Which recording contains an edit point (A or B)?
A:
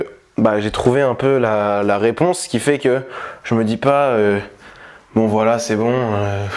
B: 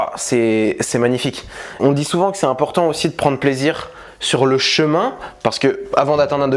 B